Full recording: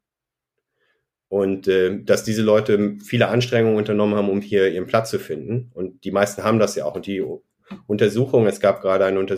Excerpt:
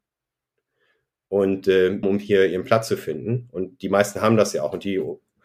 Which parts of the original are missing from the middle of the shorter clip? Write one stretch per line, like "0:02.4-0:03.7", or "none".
0:02.0-0:04.3